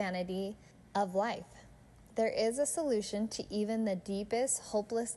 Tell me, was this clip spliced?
no; 0 cuts

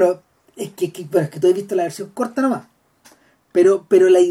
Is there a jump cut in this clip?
no; 0 cuts

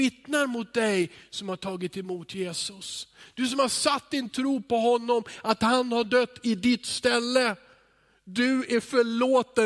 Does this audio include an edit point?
no; 0 cuts

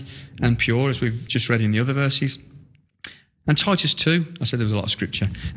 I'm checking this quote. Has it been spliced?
no; 0 cuts

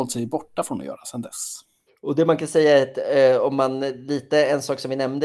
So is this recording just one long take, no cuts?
no; 1 cut; at 1.9 s

